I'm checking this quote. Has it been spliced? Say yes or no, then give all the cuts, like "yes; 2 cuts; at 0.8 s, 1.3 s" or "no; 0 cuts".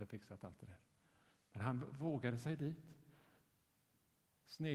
no; 0 cuts